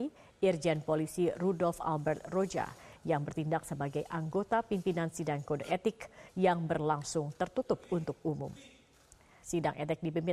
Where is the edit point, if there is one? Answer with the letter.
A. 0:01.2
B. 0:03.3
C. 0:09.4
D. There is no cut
C